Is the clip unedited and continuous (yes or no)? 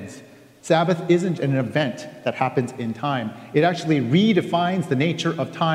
no